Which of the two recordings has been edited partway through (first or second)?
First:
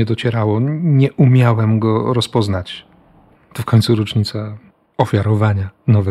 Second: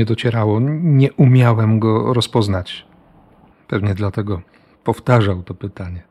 first